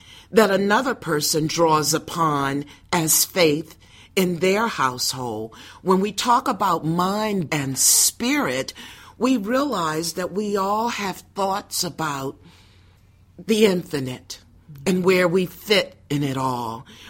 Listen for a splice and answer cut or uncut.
cut